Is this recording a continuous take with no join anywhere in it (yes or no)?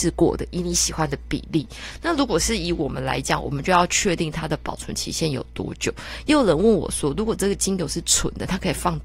yes